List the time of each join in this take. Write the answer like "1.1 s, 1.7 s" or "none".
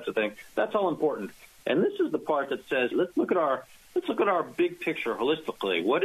1.6 s, 2.9 s